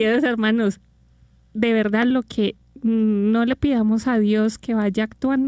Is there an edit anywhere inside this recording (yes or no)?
yes